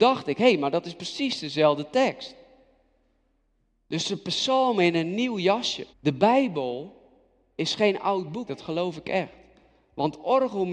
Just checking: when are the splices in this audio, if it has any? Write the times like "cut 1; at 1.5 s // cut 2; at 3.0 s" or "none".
cut 1; at 5.9 s // cut 2; at 8.5 s